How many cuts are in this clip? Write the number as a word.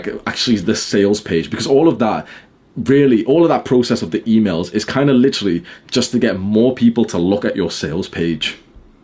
zero